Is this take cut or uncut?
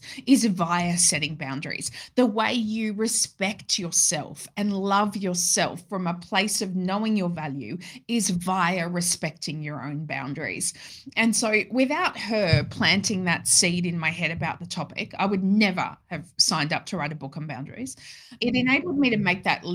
uncut